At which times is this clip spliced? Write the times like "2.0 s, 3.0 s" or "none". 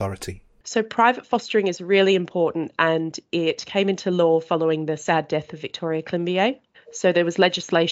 6.7 s